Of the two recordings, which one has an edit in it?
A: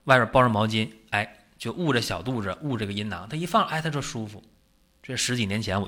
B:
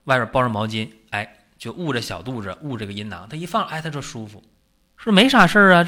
B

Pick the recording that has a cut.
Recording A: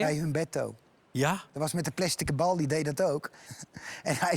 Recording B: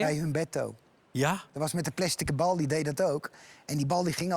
A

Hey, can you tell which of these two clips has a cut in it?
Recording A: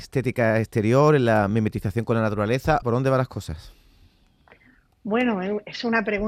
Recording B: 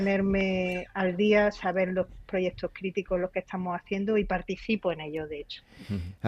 A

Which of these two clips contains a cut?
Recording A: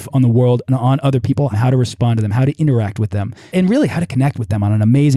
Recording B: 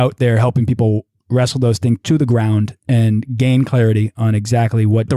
A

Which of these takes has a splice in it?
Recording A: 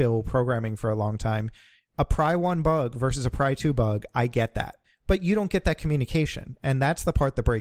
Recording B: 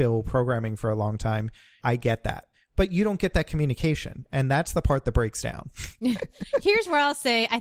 B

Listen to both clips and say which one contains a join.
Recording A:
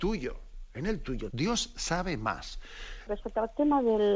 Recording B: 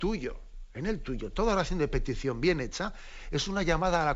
A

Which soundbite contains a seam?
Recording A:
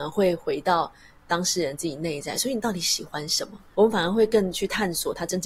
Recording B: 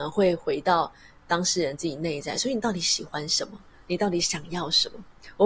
A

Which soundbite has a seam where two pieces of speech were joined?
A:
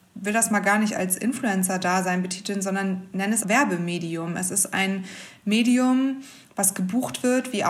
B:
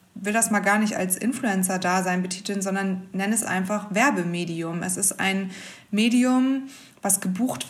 A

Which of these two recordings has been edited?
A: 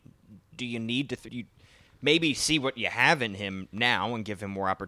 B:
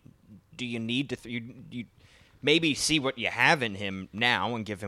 A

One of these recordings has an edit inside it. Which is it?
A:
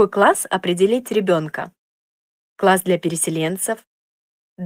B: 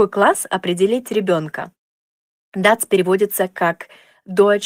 B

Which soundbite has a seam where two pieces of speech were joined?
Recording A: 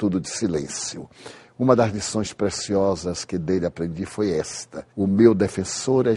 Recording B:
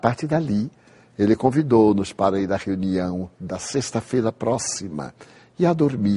A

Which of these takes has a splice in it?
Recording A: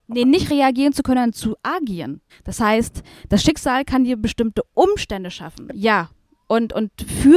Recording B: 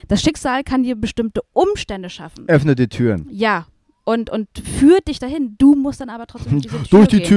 A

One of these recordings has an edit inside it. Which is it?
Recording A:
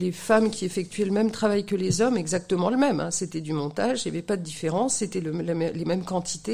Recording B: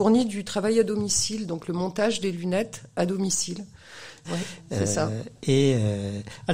B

